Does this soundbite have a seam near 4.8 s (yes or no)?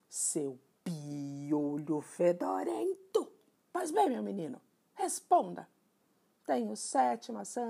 no